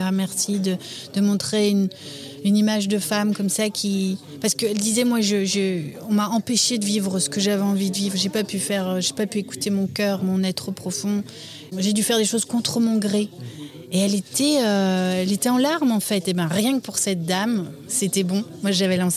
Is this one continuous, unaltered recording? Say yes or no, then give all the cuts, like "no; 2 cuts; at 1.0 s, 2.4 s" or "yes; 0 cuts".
yes; 0 cuts